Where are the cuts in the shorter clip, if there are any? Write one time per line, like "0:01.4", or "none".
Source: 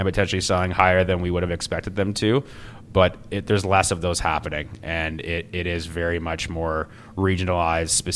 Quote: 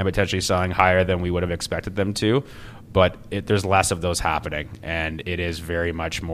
0:05.2